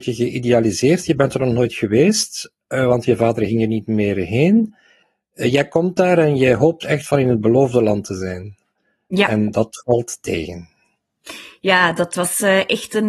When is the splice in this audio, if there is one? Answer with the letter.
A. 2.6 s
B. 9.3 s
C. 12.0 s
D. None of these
D